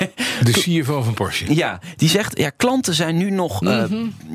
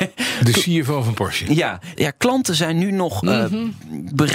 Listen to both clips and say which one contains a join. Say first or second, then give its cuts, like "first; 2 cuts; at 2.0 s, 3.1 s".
second; 1 cut; at 2.0 s